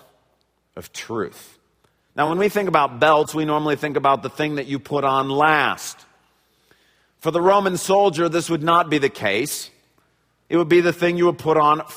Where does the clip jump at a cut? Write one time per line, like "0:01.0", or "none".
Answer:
none